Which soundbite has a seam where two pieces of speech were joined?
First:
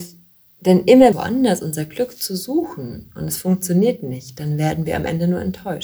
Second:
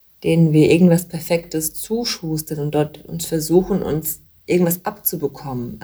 first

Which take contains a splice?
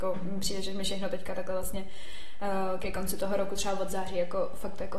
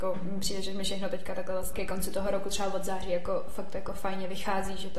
second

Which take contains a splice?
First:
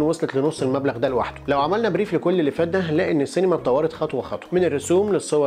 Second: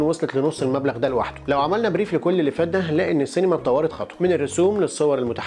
second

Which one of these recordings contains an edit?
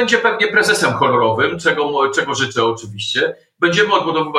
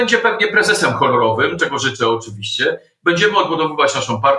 second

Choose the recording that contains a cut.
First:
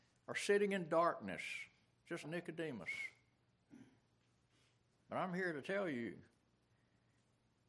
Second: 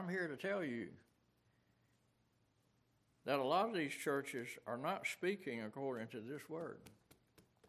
first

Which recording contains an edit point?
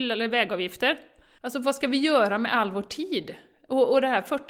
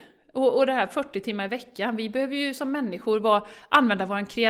first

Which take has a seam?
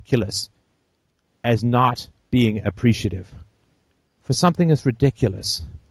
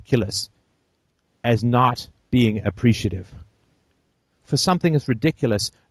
first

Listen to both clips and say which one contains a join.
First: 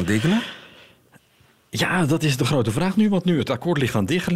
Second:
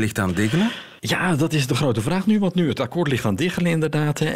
second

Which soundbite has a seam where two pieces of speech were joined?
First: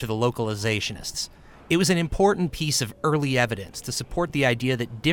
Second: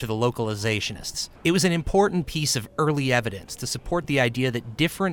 second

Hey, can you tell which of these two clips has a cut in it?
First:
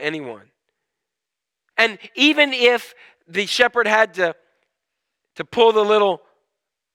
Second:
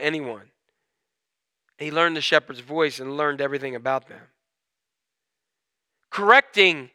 first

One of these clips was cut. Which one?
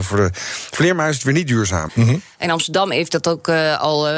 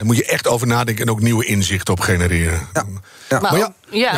first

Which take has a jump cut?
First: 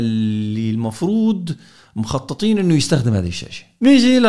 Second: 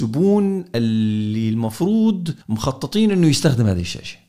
second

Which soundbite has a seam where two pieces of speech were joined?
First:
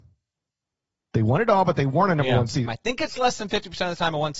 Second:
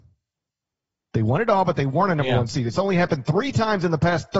first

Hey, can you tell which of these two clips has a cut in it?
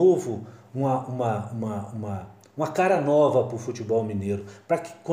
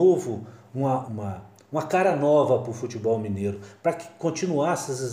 second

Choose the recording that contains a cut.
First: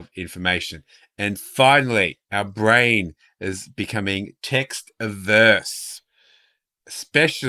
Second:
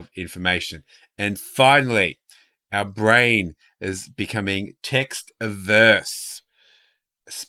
first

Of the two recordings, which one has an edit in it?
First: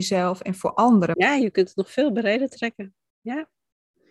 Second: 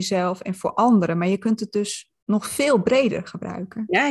first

